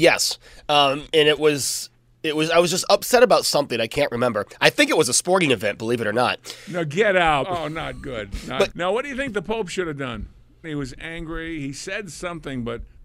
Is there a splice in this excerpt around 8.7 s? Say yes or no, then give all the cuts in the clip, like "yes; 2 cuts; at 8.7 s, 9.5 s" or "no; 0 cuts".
yes; 3 cuts; at 7.4 s, 8.7 s, 10.6 s